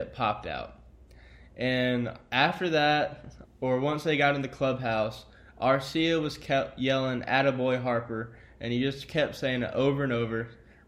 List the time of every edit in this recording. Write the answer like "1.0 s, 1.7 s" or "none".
3.4 s